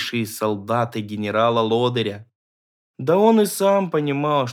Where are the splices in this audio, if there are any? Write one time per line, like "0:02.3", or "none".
0:02.8